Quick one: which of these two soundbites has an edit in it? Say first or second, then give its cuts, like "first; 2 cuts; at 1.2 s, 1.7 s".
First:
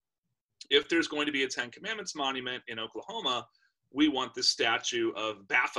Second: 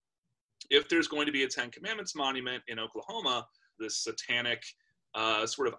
second; 1 cut; at 3.7 s